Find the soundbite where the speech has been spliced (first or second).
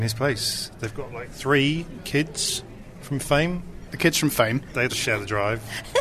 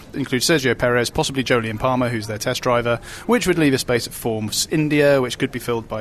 first